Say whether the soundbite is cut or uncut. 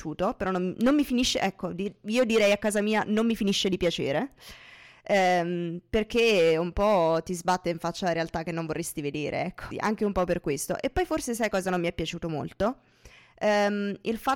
cut